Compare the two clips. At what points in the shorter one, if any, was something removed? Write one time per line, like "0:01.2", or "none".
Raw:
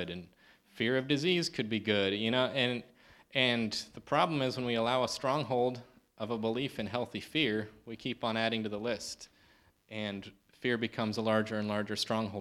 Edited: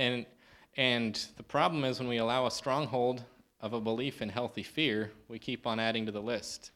none